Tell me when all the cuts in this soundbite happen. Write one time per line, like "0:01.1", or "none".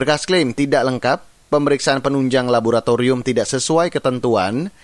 none